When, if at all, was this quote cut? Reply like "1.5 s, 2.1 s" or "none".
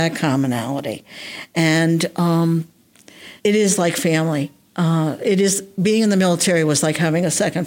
3.4 s